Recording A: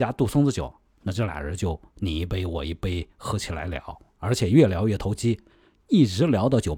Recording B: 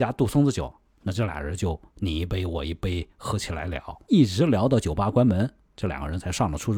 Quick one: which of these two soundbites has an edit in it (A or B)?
B